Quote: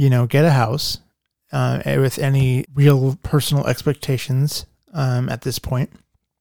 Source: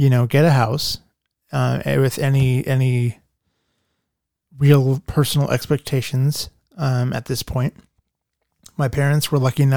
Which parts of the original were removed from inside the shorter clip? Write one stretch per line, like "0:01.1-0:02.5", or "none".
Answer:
0:02.6-0:04.5